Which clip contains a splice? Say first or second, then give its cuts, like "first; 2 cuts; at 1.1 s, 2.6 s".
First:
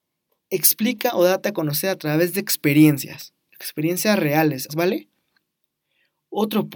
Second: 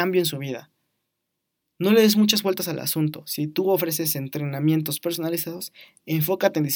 first; 1 cut; at 4.7 s